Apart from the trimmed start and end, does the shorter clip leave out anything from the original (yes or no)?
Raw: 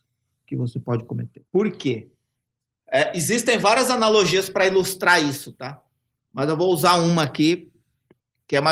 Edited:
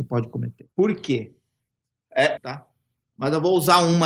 yes